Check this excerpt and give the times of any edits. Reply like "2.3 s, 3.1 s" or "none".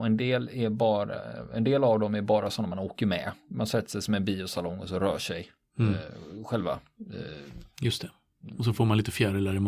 none